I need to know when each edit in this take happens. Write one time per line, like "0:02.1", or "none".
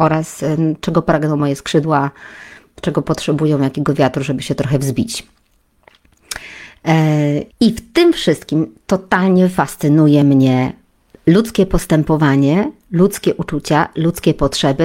0:07.5

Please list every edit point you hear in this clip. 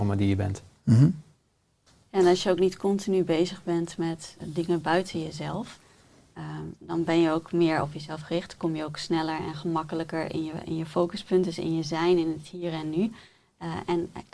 0:04.4

